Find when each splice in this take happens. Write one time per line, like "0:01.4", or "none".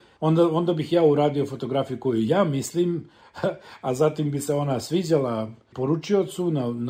none